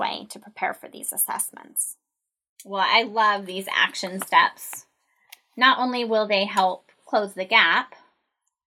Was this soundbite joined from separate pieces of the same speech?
no; 0 cuts

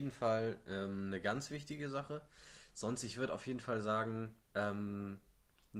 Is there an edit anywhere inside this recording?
no; 0 cuts

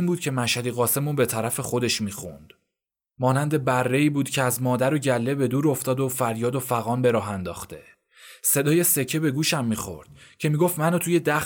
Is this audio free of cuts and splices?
yes; 0 cuts

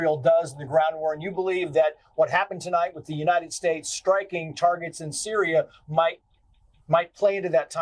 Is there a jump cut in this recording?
no; 0 cuts

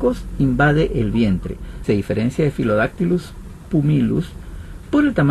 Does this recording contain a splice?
yes; 1 cut; at 1.8 s

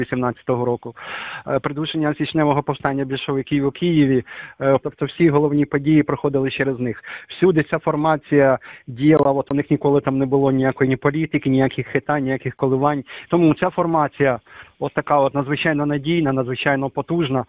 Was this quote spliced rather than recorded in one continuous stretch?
yes; 2 cuts; at 4.8 s, 13.3 s

